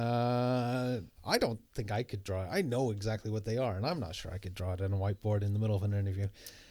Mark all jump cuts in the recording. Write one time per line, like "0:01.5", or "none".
0:01.2